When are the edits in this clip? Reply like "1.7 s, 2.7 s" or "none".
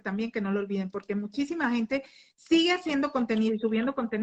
none